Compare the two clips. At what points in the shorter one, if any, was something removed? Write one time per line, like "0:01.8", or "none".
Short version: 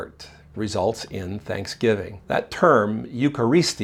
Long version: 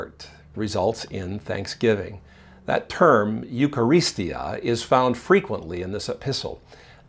0:02.2